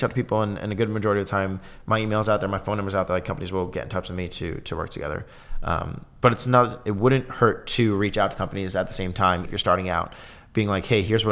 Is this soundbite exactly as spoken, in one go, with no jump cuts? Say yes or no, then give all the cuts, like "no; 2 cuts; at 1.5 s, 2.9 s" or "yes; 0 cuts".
no; 1 cut; at 9.4 s